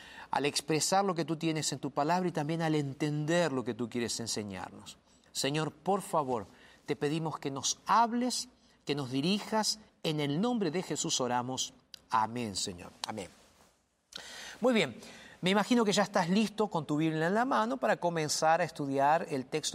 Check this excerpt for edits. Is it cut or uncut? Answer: uncut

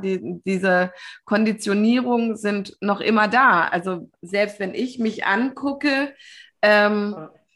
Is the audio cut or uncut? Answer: uncut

